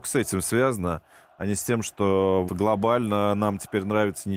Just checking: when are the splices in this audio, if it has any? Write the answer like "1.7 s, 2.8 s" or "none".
2.5 s